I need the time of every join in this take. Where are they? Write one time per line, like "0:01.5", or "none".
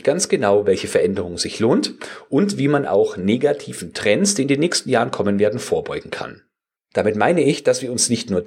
0:06.8